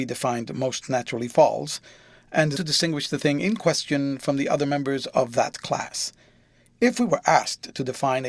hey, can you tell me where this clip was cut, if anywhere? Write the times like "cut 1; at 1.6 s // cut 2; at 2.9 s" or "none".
cut 1; at 2.6 s